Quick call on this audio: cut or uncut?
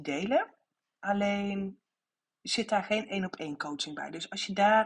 uncut